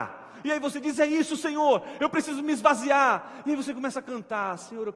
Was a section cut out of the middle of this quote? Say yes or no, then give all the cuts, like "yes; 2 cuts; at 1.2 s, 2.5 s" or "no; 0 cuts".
no; 0 cuts